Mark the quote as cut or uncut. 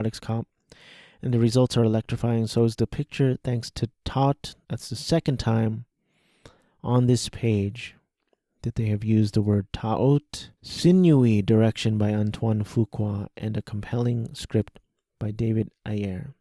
cut